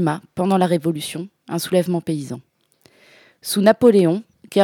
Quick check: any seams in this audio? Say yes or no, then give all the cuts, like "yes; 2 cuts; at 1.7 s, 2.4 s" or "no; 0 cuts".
no; 0 cuts